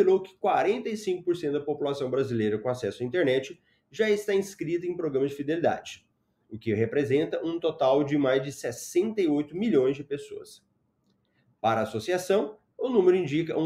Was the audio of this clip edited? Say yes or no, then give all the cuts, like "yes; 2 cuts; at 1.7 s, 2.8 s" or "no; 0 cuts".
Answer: no; 0 cuts